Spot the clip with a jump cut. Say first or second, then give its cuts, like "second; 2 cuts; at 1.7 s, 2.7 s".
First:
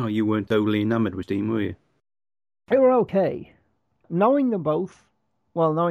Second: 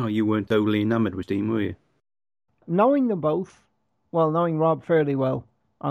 second; 1 cut; at 2.5 s